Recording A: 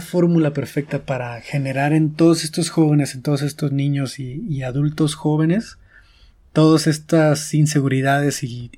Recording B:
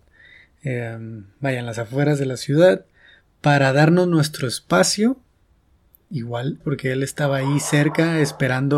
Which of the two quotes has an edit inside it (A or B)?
B